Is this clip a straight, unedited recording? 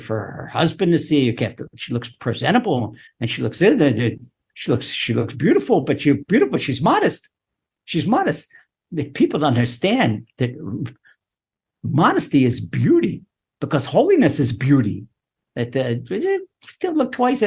yes; 0 cuts

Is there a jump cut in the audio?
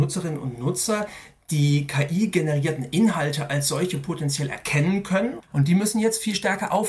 yes; 1 cut; at 5.5 s

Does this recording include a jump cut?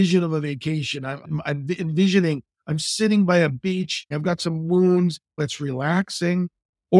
yes; 2 cuts; at 4.1 s, 5.4 s

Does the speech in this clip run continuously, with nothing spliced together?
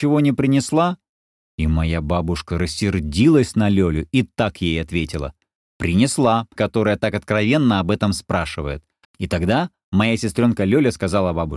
no; 2 cuts; at 6.6 s, 9.0 s

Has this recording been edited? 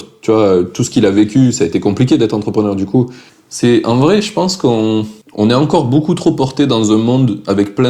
yes; 2 cuts; at 3.3 s, 5.2 s

